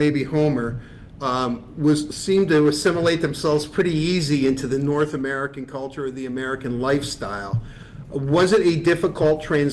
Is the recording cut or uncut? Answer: uncut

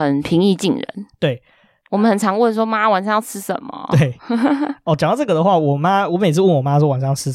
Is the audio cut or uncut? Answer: uncut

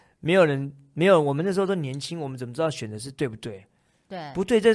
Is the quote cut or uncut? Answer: uncut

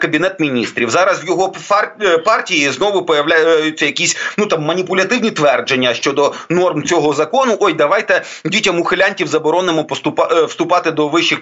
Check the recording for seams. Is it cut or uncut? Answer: uncut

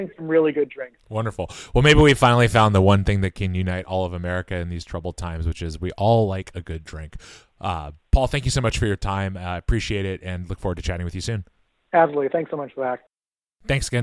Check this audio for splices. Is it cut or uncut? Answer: cut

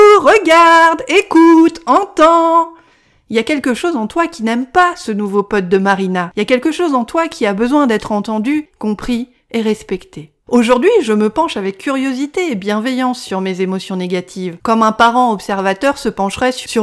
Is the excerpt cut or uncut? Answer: cut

